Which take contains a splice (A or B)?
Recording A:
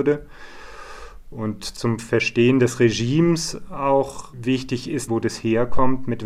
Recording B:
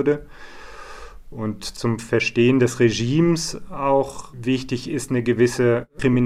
A